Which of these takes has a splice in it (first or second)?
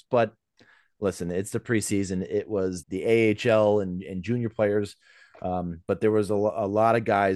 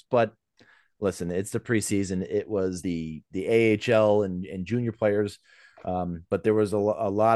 first